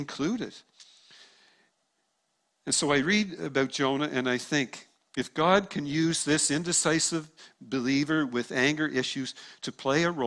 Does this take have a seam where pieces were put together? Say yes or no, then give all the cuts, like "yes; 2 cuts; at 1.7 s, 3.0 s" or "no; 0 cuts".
no; 0 cuts